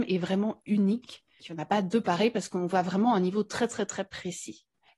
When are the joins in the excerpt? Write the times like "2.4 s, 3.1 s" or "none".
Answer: none